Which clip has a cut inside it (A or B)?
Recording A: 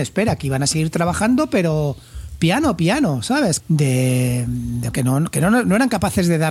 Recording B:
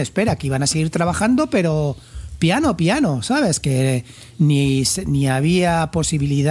A